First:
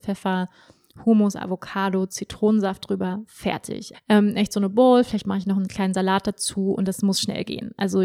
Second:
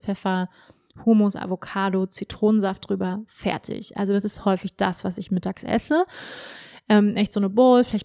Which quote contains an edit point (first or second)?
first